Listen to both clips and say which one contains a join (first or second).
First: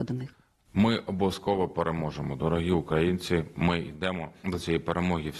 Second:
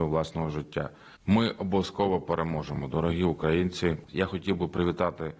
second